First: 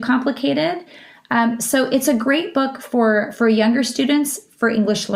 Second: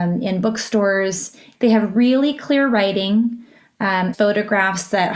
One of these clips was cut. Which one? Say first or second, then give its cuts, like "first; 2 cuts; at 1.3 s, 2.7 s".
second; 2 cuts; at 1.5 s, 4.1 s